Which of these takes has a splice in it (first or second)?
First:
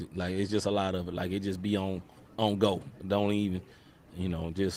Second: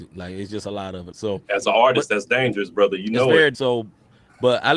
second